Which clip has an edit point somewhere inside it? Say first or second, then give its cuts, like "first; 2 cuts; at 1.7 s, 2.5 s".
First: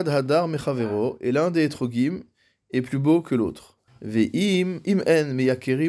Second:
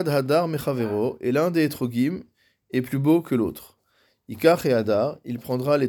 first; 1 cut; at 3.9 s